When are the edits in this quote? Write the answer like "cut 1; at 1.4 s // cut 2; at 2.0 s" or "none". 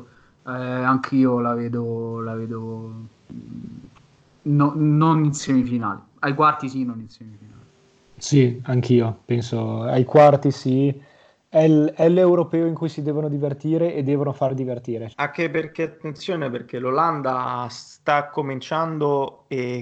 cut 1; at 15.1 s